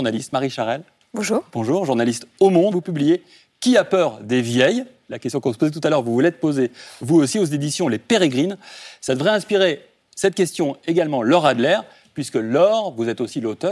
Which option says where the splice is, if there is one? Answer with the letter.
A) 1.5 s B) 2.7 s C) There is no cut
B